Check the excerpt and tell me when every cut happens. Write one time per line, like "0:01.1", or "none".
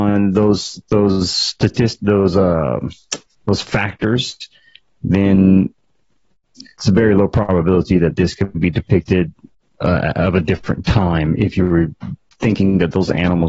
none